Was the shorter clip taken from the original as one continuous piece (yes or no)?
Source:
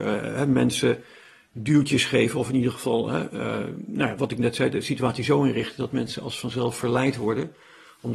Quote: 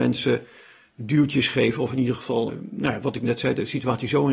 no